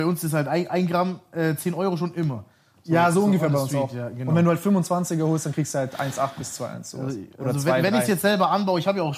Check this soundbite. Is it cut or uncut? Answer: uncut